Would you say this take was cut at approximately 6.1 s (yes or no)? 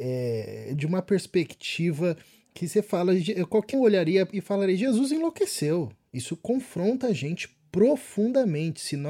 yes